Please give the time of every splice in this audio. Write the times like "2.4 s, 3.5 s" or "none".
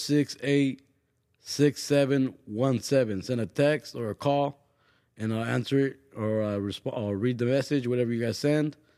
none